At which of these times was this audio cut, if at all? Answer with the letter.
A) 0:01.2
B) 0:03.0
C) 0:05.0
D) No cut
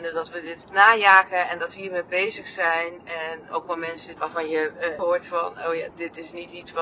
D